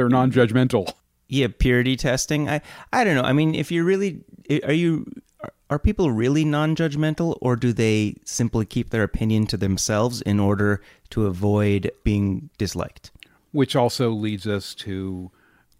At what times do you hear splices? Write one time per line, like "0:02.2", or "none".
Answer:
0:12.0
0:13.4